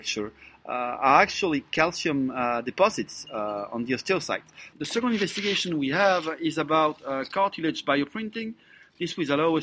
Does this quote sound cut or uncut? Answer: cut